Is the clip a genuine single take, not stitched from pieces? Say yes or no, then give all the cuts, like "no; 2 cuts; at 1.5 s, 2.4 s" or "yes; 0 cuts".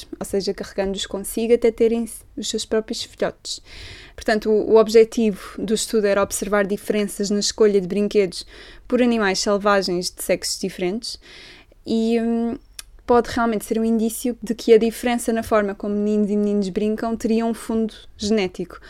no; 1 cut; at 13.0 s